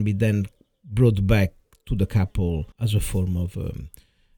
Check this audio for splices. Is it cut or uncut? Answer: cut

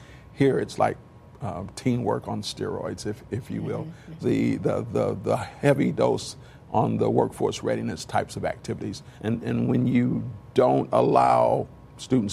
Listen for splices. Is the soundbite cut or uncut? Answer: cut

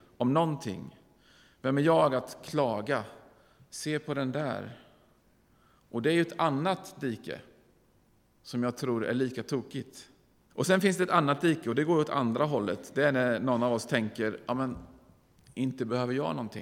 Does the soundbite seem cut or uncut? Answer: cut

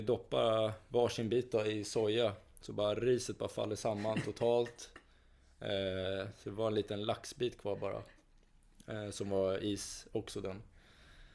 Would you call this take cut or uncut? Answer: uncut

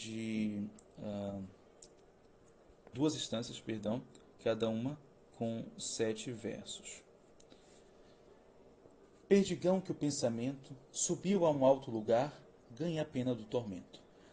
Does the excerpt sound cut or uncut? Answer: cut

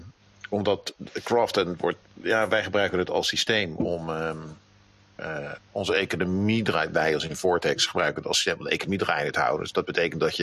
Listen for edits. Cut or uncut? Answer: uncut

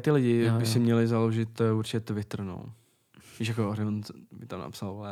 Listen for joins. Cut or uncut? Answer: uncut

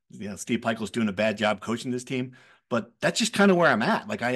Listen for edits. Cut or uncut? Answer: uncut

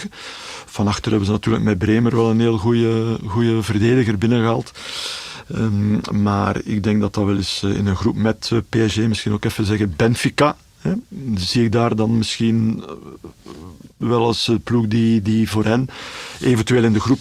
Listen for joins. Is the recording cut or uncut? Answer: cut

